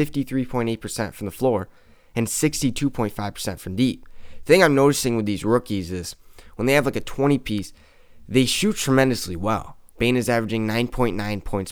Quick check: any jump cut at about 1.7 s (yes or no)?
no